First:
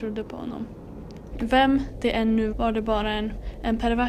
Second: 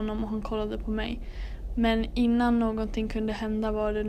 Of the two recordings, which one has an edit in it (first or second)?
first